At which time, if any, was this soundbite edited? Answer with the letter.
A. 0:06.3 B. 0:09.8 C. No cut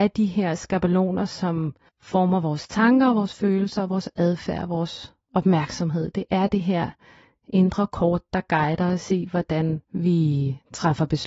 B